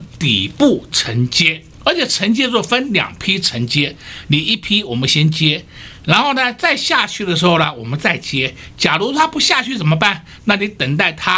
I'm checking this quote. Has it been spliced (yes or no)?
yes